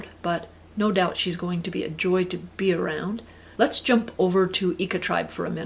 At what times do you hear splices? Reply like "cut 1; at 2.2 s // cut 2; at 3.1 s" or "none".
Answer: cut 1; at 3.5 s